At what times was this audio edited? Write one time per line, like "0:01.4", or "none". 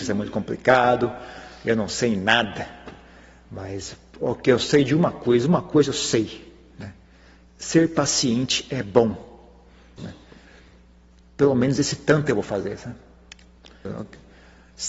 0:10.0
0:13.8